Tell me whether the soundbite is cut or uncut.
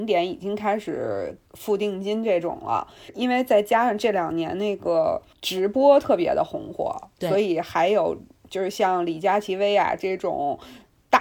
uncut